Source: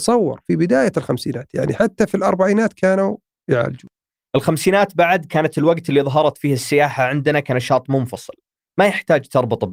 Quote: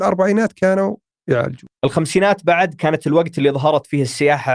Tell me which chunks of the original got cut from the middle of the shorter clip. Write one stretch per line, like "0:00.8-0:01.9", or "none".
0:04.0-0:04.3